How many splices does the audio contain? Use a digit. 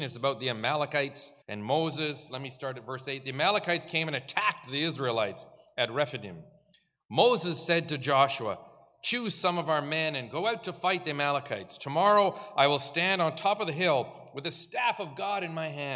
1